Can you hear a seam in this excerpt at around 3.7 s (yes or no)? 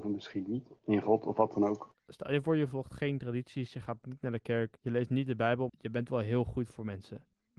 no